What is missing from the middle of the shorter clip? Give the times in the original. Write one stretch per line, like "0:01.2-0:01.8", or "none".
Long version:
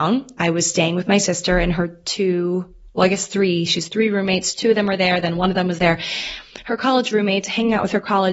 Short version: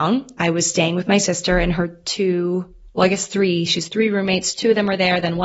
none

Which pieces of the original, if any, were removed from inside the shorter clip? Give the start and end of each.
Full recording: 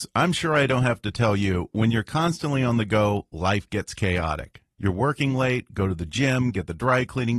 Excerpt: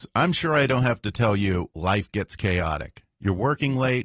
0:01.7-0:03.3

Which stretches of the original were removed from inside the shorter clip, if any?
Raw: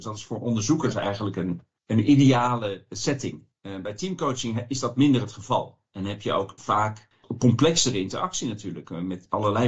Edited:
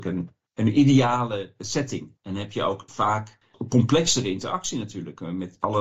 0:03.5-0:05.9

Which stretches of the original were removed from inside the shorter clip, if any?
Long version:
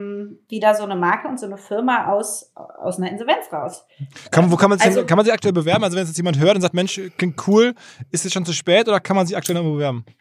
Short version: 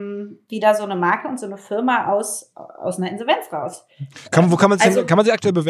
none

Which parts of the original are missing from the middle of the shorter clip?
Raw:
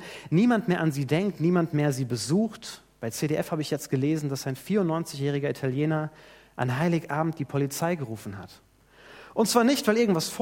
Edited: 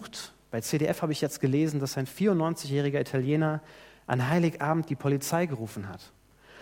none

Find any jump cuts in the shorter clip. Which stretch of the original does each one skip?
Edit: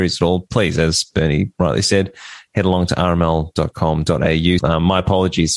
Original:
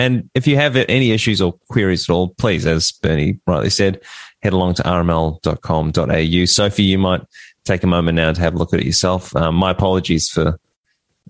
0:06.5-0:09.3

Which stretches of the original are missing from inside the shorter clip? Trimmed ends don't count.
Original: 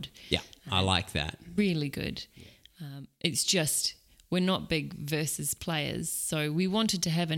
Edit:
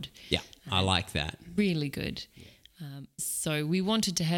0:03.2-0:06.0

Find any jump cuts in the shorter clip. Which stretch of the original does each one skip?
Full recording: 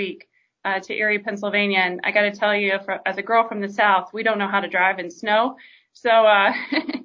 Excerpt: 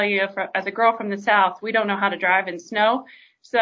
none

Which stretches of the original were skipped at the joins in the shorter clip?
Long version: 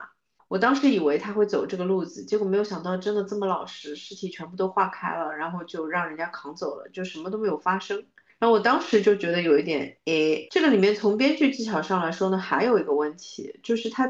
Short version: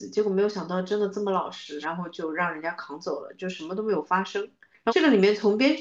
0:04.0-0:05.4
0:08.4-0:10.5

